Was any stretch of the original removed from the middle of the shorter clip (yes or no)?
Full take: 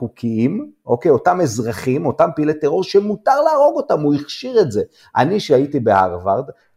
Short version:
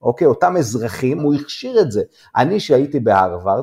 yes